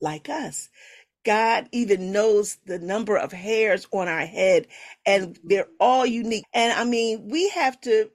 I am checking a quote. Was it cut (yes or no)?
yes